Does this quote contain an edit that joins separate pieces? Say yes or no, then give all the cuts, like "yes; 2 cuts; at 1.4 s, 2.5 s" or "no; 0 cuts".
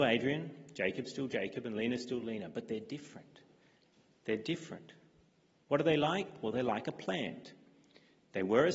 no; 0 cuts